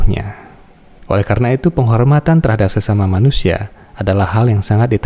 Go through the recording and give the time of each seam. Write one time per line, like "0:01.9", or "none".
0:01.0